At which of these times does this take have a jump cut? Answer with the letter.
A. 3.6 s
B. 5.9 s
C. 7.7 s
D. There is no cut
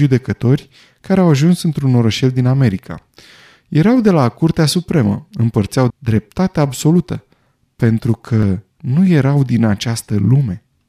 B